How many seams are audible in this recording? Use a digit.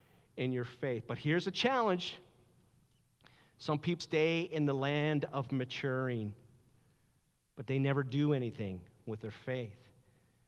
1